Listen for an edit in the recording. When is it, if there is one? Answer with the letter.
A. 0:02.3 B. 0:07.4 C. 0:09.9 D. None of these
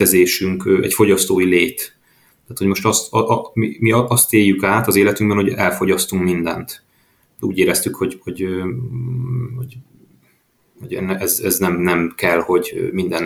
B